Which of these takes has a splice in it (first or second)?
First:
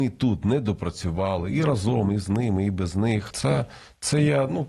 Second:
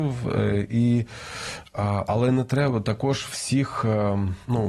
first